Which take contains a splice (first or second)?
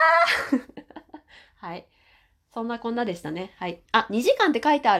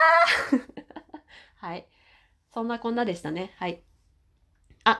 first